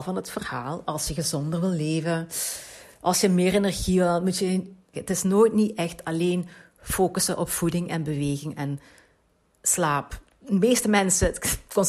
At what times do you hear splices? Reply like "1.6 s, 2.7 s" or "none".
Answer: 4.9 s